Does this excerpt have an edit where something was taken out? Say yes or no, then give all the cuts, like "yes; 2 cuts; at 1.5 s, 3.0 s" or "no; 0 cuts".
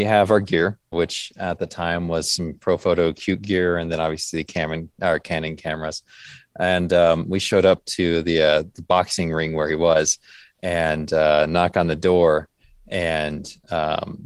yes; 1 cut; at 0.9 s